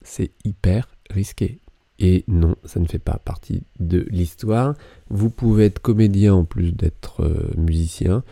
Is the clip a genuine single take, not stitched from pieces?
no; 1 cut; at 1.9 s

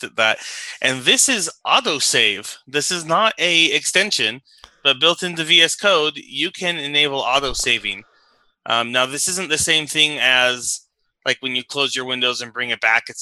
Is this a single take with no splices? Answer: yes; 0 cuts

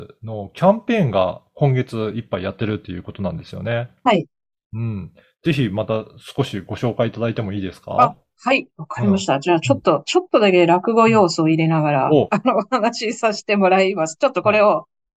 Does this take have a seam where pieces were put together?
no; 0 cuts

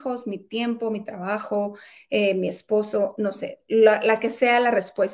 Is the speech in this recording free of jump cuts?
yes; 0 cuts

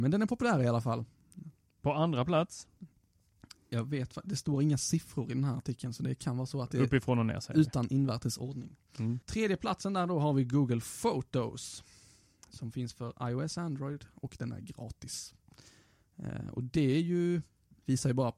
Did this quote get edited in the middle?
yes; 1 cut; at 9.2 s

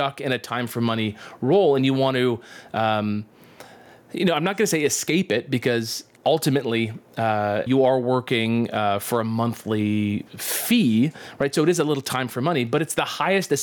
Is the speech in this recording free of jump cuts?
no; 1 cut; at 7.7 s

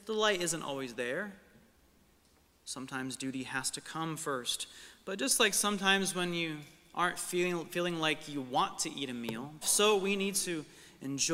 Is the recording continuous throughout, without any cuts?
no; 1 cut; at 9.6 s

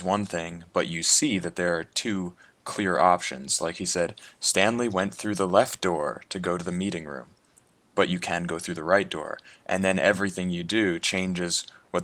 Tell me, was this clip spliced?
no; 0 cuts

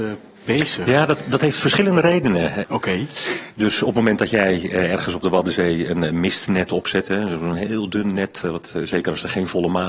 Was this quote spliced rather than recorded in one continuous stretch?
yes; 2 cuts; at 2.6 s, 8.4 s

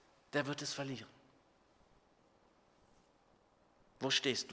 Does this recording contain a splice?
no; 0 cuts

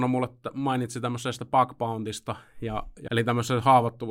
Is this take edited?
yes; 1 cut; at 3.1 s

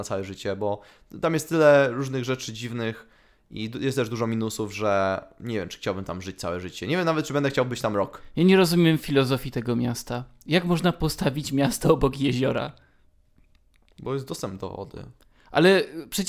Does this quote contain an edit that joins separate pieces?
no; 0 cuts

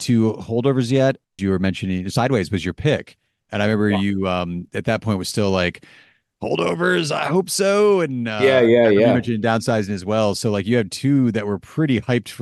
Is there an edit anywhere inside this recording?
yes; 1 cut; at 1.4 s

